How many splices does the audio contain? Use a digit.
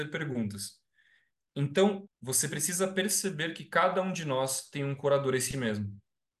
1